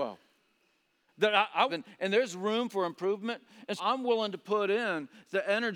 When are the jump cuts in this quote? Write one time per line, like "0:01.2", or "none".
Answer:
0:01.7
0:03.8